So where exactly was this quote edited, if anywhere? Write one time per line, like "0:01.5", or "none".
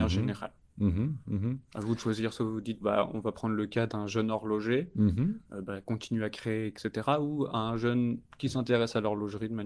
0:02.8